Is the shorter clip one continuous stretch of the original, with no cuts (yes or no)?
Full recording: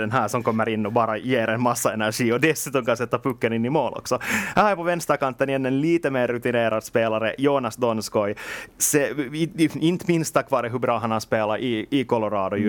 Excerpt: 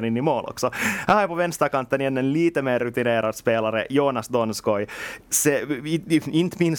yes